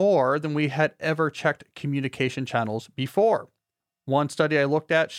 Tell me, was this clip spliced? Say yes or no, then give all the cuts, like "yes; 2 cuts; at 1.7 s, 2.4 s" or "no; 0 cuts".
no; 0 cuts